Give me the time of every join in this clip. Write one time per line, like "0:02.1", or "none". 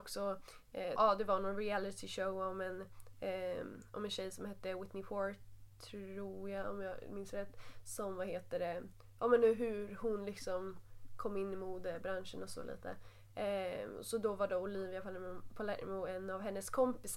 0:01.0